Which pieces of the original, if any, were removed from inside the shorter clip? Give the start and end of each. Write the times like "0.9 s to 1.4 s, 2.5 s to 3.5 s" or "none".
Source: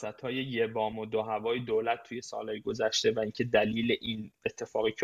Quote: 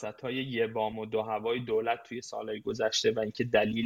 none